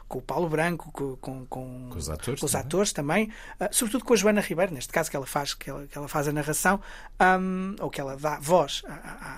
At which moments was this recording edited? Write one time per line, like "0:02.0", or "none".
none